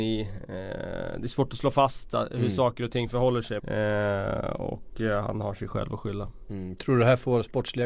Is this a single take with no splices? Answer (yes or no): no